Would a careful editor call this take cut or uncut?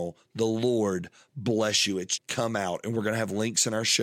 cut